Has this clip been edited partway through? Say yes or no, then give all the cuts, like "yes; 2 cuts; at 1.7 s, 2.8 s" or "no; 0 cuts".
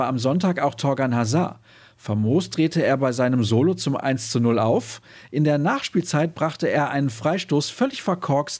no; 0 cuts